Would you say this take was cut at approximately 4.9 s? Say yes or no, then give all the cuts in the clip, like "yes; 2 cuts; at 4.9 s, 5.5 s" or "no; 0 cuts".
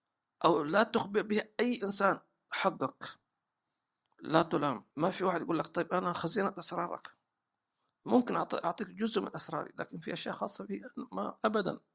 yes; 1 cut; at 4.9 s